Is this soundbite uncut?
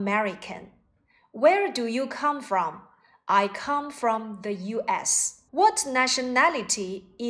no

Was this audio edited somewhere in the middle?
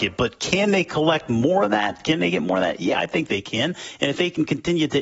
no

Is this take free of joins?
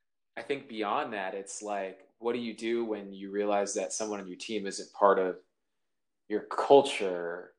yes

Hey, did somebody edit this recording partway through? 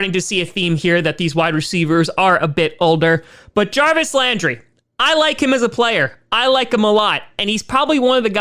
no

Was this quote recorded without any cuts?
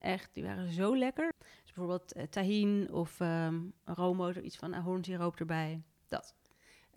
no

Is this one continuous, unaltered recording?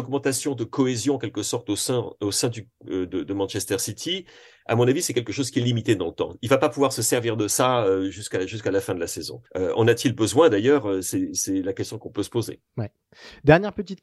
no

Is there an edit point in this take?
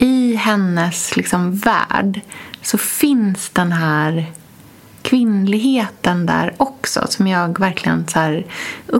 no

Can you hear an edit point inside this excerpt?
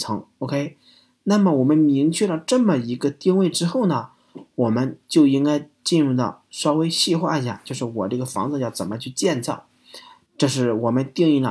yes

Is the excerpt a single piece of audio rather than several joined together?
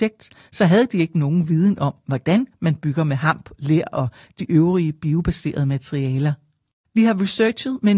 yes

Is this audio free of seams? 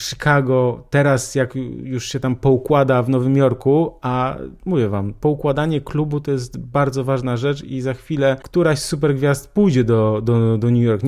yes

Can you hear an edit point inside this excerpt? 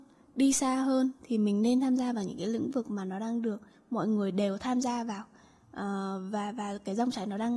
no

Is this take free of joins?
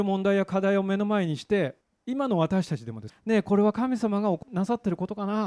no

